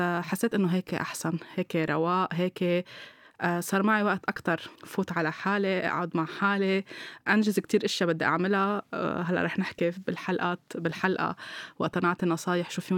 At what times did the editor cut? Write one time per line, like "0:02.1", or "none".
0:04.8